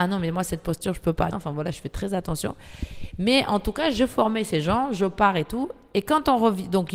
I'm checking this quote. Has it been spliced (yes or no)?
yes